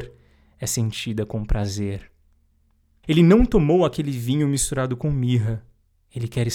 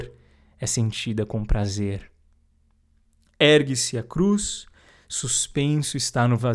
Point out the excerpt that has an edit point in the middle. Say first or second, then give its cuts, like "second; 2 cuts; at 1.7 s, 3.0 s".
first; 1 cut; at 3.0 s